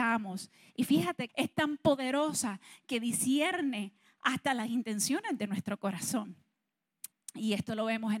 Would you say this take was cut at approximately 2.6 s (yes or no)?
no